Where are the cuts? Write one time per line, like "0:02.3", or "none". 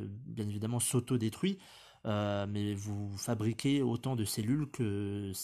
none